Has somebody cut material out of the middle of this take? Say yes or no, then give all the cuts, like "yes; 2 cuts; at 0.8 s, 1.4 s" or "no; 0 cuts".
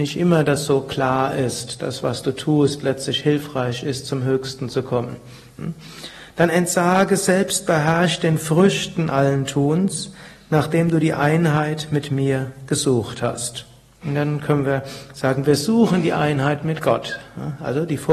yes; 1 cut; at 14.0 s